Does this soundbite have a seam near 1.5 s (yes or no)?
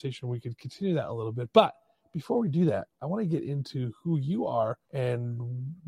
no